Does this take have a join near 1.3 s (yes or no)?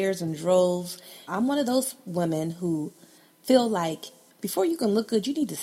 yes